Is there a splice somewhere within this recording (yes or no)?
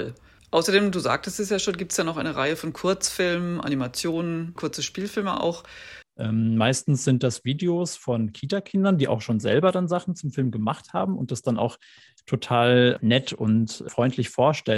yes